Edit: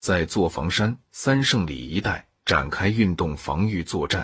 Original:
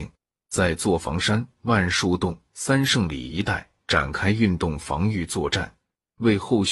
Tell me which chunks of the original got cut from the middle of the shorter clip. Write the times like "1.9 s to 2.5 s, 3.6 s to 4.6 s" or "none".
1.5 s to 2.5 s